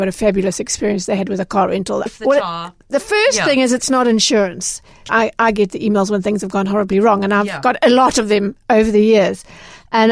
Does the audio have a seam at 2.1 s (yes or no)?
yes